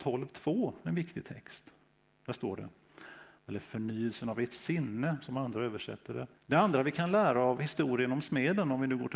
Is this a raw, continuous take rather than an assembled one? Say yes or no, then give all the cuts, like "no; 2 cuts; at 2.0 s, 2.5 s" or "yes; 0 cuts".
no; 2 cuts; at 3.4 s, 6.3 s